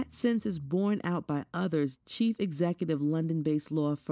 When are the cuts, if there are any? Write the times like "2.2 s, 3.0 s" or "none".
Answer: 2.0 s